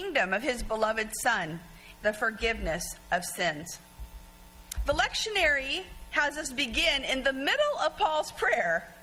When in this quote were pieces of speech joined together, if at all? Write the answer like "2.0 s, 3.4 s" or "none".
1.9 s